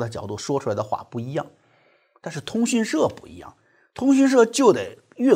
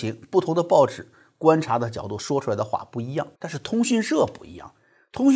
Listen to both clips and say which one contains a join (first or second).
second